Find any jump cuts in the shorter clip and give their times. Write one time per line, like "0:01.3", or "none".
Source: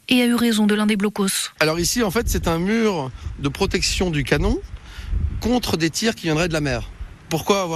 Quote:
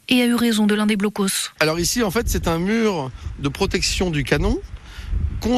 none